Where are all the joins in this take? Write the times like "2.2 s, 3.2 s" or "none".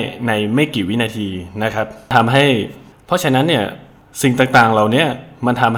none